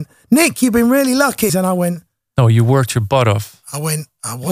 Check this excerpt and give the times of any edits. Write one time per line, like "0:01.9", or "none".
0:01.5